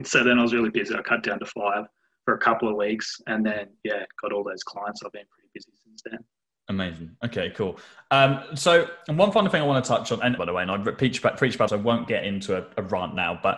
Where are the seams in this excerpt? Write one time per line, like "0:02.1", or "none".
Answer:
0:10.4
0:11.7